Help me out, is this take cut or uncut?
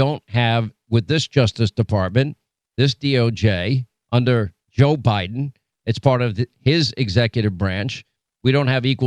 cut